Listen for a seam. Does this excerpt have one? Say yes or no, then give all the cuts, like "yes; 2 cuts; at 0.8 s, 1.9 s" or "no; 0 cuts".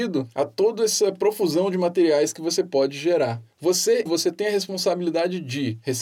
yes; 1 cut; at 4.1 s